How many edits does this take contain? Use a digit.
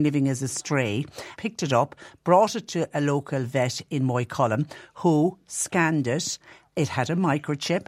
1